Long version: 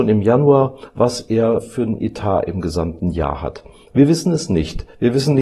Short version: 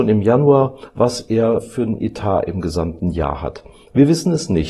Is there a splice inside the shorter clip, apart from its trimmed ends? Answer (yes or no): no